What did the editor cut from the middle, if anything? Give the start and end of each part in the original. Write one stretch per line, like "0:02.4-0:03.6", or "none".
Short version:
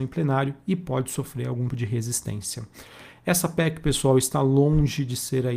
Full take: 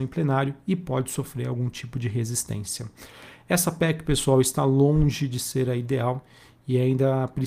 0:01.7-0:01.9